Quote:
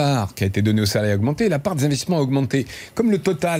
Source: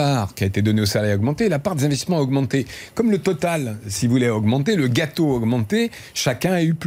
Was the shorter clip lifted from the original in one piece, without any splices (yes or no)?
yes